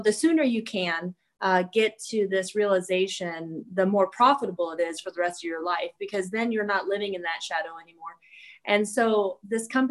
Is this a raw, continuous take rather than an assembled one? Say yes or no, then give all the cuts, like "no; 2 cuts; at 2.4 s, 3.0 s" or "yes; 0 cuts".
yes; 0 cuts